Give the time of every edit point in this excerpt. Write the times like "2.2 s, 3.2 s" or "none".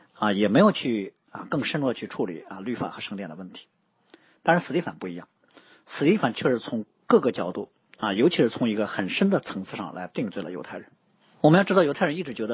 11.3 s